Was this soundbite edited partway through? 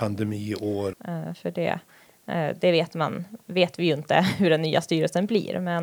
yes; 1 cut; at 0.9 s

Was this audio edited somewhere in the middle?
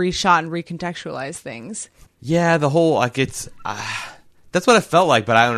yes; 1 cut; at 2.1 s

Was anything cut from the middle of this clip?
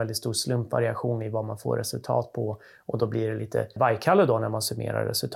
yes; 1 cut; at 3.8 s

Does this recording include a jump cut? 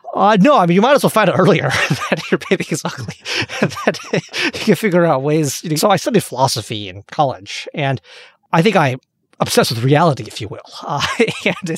yes; 1 cut; at 5.8 s

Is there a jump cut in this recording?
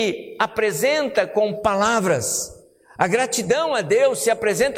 no; 0 cuts

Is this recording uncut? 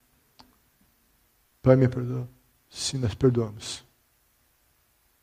yes; 0 cuts

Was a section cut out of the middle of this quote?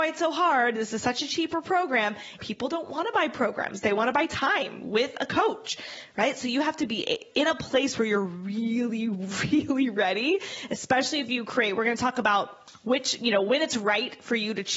yes; 1 cut; at 2.4 s

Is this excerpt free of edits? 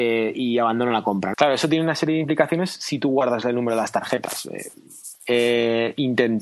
no; 2 cuts; at 1.3 s, 5.2 s

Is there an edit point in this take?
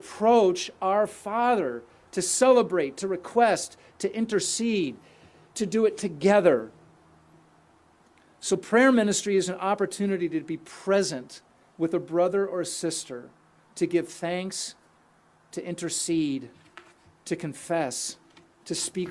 no; 0 cuts

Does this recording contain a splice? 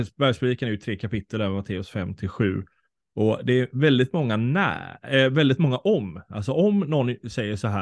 no; 0 cuts

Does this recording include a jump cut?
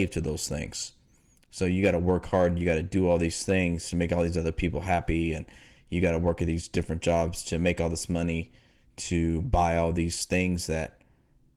no; 0 cuts

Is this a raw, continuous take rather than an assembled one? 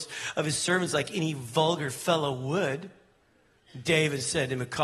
yes; 0 cuts

